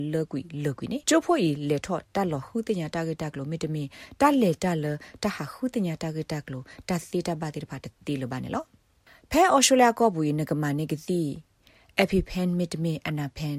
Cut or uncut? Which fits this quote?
cut